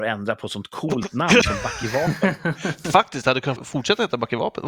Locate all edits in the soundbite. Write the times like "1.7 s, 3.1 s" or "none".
3.6 s